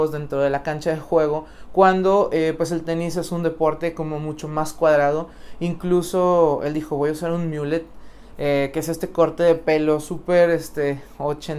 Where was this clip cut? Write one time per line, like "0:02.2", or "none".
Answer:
none